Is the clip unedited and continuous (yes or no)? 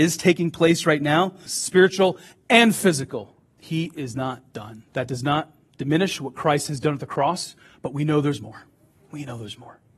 no